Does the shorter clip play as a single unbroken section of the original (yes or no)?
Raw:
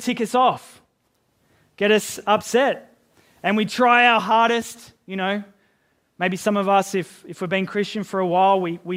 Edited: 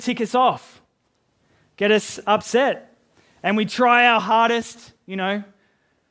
yes